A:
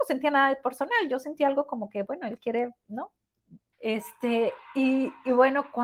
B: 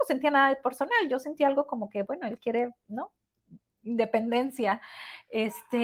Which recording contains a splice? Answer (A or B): A